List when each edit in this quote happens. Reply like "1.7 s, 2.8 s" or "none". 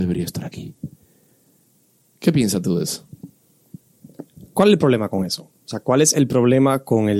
none